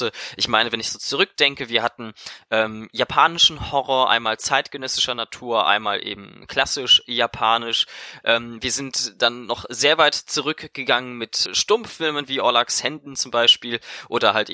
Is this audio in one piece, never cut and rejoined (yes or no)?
no